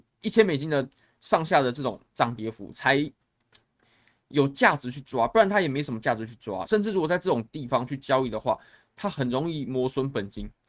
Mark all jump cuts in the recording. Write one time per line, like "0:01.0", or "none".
0:06.7